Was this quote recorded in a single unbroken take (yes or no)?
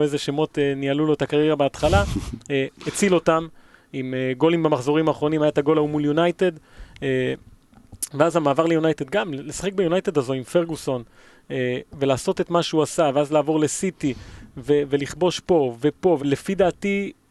no